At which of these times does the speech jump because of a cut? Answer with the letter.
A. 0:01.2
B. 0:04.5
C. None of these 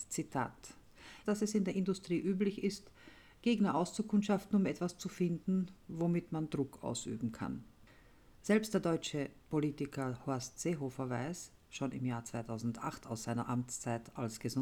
A